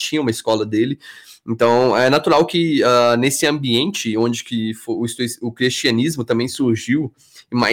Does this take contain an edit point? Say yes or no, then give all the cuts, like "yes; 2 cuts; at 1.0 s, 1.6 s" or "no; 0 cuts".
no; 0 cuts